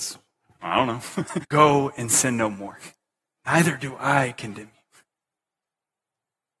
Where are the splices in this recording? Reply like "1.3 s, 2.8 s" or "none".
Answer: 1.4 s, 3.4 s